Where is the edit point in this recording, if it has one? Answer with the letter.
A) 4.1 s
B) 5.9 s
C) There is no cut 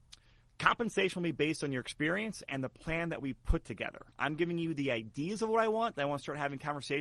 A